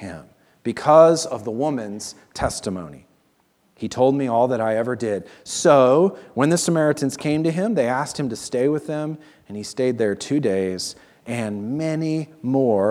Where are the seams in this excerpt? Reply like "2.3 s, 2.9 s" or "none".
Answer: none